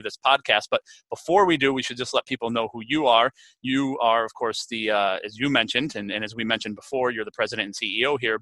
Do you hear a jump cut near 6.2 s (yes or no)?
no